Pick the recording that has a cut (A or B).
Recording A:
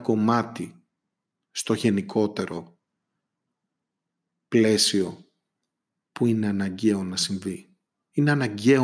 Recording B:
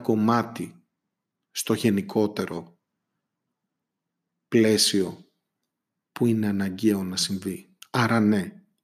B